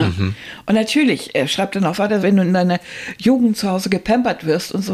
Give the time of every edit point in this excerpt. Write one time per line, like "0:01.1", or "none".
0:02.2